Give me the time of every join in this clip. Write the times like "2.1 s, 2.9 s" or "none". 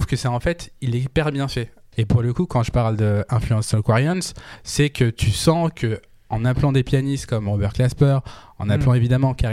1.9 s